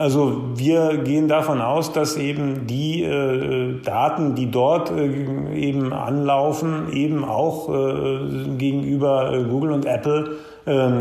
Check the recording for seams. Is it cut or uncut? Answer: uncut